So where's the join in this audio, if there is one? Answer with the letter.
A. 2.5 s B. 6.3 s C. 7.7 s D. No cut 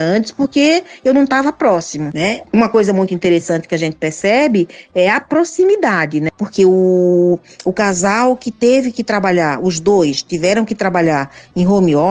B